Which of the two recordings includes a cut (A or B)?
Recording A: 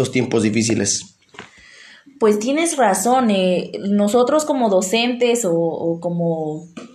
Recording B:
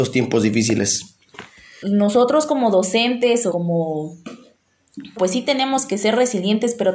B